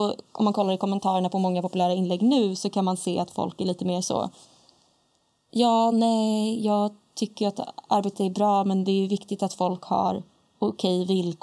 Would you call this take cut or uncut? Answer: uncut